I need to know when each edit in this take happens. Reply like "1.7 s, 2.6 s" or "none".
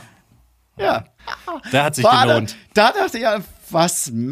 1.2 s

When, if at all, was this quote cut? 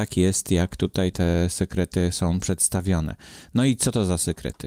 1.1 s

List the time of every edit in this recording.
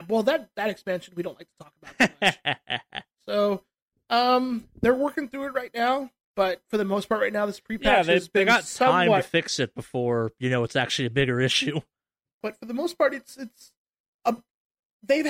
3.1 s, 12.4 s

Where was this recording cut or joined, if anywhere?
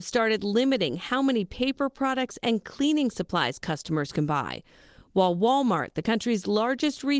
none

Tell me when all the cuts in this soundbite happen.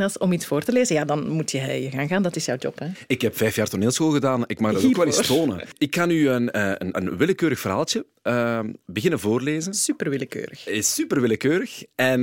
6.9 s

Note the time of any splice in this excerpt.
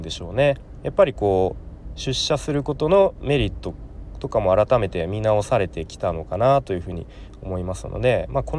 none

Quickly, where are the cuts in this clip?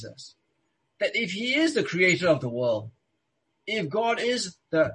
none

